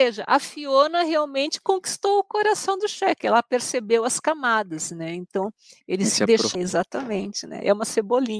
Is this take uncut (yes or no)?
no